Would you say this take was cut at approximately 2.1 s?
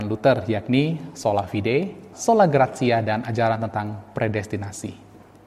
yes; 1 cut; at 2.1 s

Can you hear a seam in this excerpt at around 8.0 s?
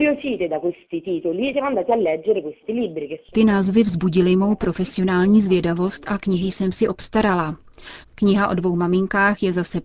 yes; 1 cut; at 8.0 s

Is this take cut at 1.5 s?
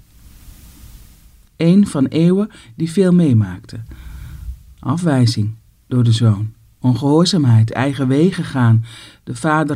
yes; 1 cut; at 1.5 s

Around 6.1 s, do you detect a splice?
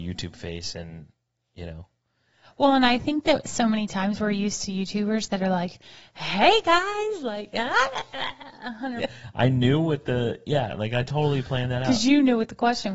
no; 1 cut; at 9.0 s

